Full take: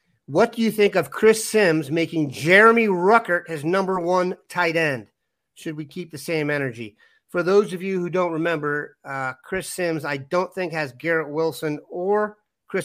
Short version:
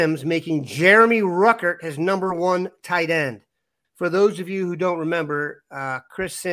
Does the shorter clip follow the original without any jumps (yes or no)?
no